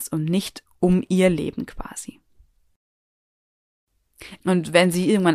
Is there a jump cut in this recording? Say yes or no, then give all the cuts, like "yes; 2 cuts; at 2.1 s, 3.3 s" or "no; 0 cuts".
yes; 1 cut; at 4.4 s